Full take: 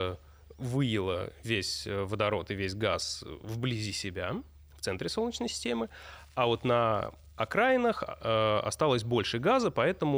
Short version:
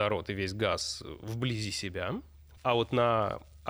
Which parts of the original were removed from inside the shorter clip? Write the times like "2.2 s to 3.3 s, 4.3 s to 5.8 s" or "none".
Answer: 4.8 s to 6.3 s